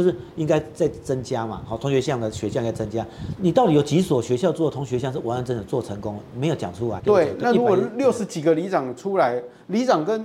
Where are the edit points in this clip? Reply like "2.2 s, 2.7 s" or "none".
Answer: 3.4 s, 7.0 s